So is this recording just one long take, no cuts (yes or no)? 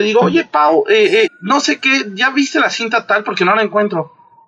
no